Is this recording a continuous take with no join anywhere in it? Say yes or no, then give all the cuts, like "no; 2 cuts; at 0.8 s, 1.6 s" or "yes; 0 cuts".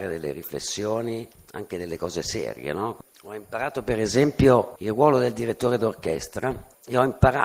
yes; 0 cuts